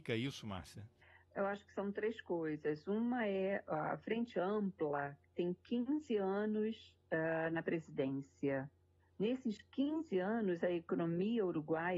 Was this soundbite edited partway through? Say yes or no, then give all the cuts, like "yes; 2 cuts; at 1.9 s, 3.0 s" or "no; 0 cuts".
no; 0 cuts